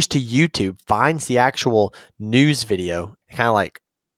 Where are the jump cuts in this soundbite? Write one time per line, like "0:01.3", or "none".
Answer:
0:03.2